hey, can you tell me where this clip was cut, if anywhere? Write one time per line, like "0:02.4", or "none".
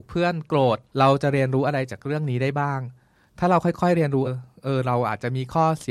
0:04.2